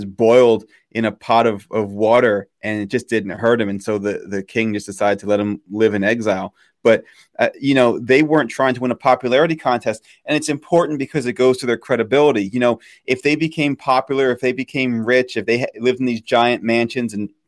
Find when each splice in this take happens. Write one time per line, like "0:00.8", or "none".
none